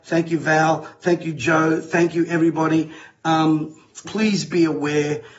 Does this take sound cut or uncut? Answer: cut